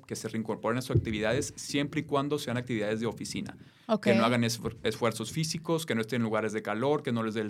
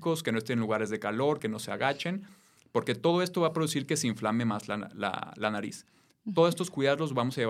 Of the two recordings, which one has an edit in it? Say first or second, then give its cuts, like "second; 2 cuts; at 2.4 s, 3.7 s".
second; 1 cut; at 1.4 s